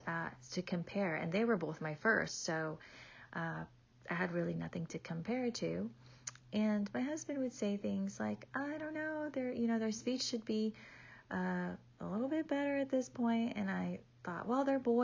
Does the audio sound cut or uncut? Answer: uncut